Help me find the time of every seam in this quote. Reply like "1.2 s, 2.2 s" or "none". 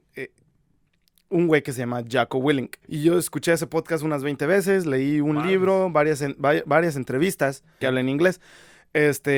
2.8 s, 7.8 s